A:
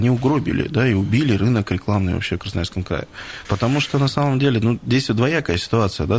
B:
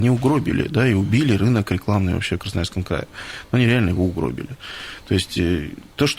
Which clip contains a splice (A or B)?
A